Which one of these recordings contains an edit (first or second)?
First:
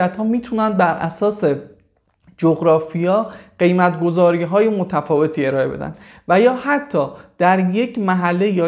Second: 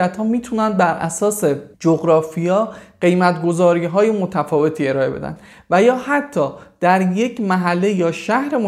second